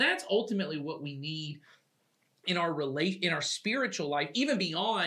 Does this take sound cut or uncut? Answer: uncut